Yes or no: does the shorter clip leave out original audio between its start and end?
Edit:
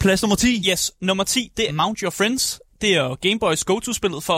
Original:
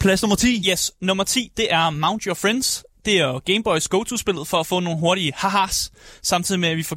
yes